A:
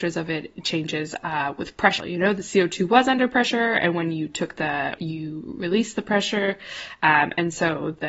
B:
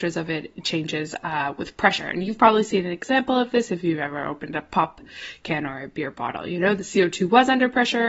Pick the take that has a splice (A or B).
A